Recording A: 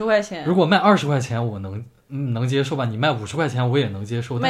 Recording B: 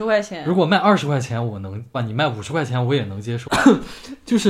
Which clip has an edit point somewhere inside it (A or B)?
B